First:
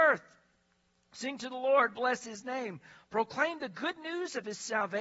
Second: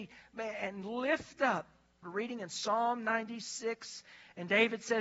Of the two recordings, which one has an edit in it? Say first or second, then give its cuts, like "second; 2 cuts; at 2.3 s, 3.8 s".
second; 1 cut; at 2.0 s